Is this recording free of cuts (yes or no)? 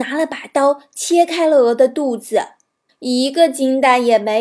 no